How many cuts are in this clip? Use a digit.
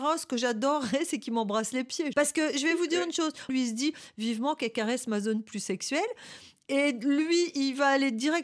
2